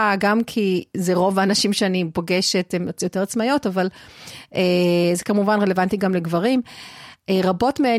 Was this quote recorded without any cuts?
yes; 0 cuts

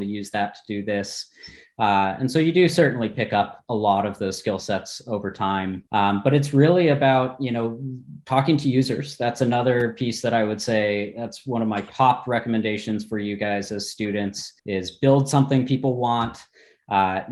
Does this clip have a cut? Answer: yes; 2 cuts; at 5.9 s, 14.6 s

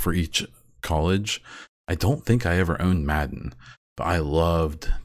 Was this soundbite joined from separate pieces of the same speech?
yes; 1 cut; at 1.8 s

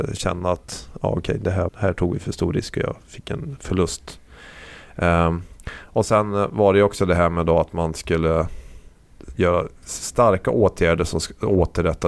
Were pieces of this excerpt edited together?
yes; 1 cut; at 1.7 s

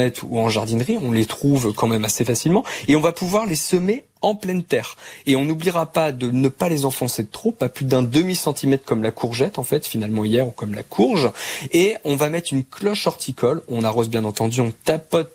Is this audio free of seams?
yes; 0 cuts

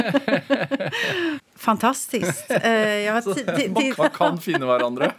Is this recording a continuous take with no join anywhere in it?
no; 2 cuts; at 1.4 s, 4.0 s

